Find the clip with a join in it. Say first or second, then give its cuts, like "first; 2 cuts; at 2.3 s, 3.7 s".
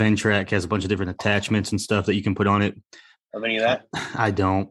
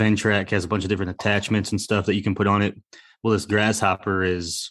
first; 1 cut; at 3.2 s